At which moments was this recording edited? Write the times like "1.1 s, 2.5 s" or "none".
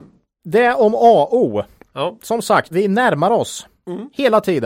2.7 s